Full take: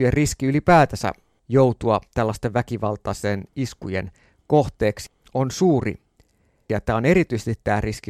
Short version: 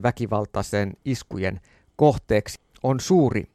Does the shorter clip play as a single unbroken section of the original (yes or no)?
yes